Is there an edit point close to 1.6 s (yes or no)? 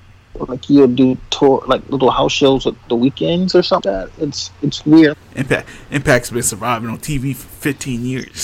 no